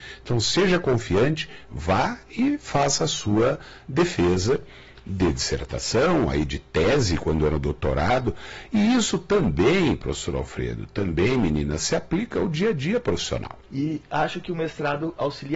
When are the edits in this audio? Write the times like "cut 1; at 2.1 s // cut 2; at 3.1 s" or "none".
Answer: cut 1; at 13.7 s